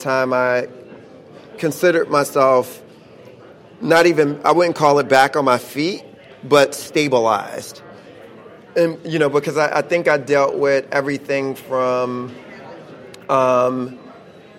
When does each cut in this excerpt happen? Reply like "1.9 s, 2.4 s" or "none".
none

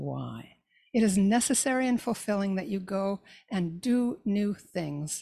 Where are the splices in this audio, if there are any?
none

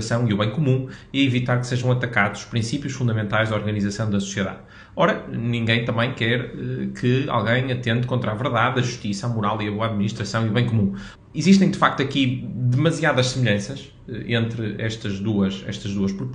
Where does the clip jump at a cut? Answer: 11.2 s

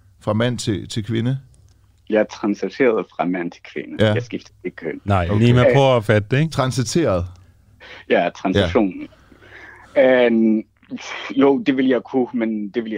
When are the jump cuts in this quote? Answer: none

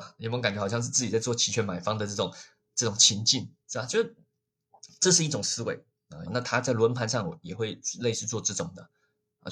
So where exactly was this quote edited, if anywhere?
3.6 s, 6.3 s

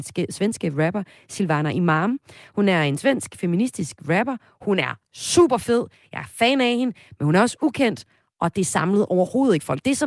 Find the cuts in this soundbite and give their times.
none

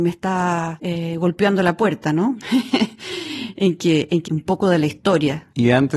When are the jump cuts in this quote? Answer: 2.4 s, 4.3 s

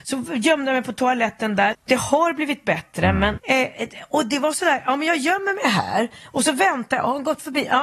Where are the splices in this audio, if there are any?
1.7 s, 3.4 s

